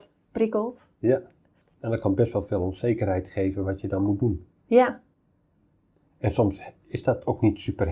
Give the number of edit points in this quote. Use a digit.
0